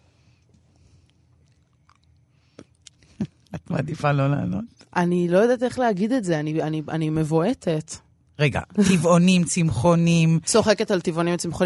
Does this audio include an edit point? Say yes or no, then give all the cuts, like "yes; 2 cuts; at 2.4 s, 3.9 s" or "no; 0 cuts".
no; 0 cuts